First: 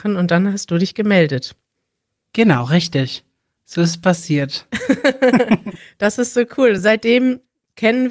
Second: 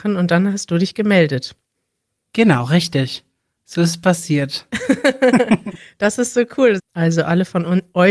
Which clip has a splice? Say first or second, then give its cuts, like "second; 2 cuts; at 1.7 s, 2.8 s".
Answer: second; 1 cut; at 6.8 s